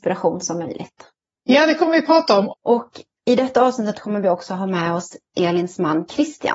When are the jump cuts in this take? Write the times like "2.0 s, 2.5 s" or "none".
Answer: 2.5 s